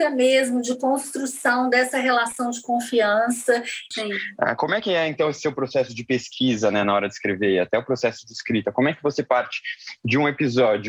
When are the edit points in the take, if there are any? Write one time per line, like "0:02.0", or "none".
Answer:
0:03.9